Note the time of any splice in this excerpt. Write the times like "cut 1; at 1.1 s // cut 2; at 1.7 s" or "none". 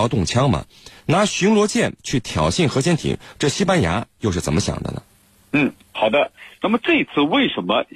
none

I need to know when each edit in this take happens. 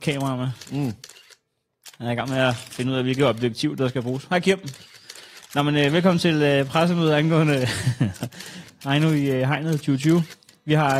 none

